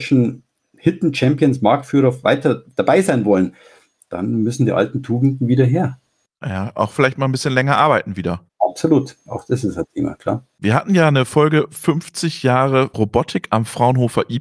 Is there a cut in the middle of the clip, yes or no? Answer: no